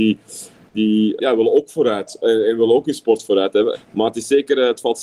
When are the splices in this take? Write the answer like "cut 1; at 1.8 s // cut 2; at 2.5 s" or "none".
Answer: cut 1; at 1.2 s // cut 2; at 3.7 s